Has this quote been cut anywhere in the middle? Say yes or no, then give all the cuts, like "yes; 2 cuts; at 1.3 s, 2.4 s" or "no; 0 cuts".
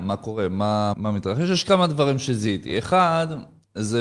yes; 1 cut; at 0.9 s